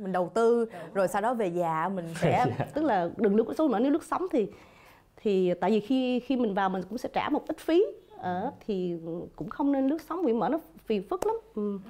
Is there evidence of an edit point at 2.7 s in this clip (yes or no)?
yes